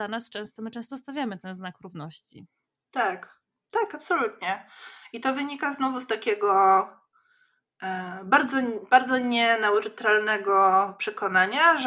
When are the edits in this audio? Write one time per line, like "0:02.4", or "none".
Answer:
none

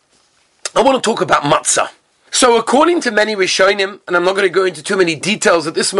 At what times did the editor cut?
0:02.3

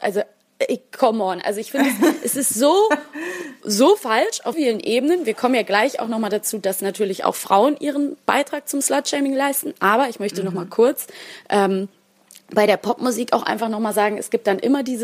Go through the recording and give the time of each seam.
0:04.5

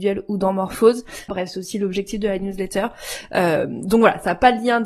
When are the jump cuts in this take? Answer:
0:01.3

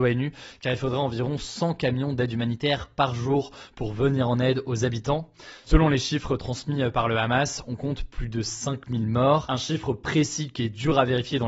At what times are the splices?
0:05.7

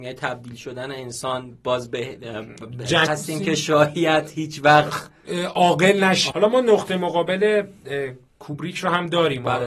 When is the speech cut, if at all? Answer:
0:03.1
0:06.3

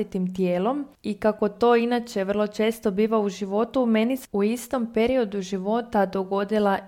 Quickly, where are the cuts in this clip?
none

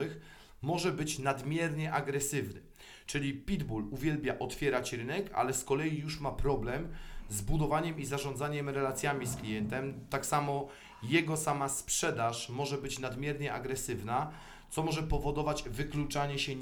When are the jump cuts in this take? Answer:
none

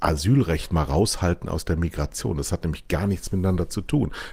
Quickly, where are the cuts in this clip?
none

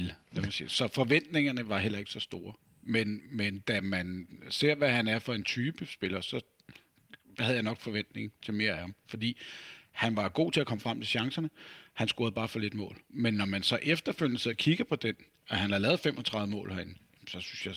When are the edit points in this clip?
none

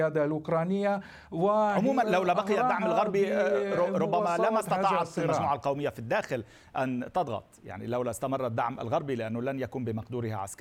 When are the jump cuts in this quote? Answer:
0:02.0

